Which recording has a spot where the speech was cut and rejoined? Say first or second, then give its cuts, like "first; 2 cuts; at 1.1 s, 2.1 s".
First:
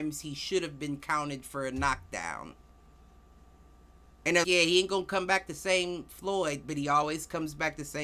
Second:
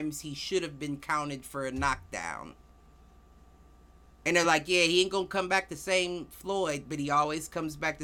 first; 1 cut; at 4.4 s